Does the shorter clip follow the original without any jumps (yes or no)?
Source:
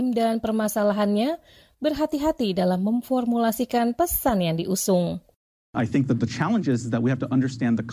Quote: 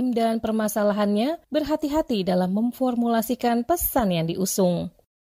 no